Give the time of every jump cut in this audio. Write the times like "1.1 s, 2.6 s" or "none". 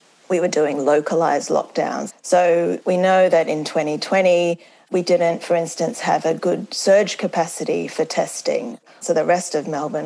2.1 s, 9.0 s